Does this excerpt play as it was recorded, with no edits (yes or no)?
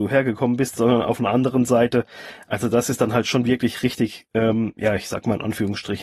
yes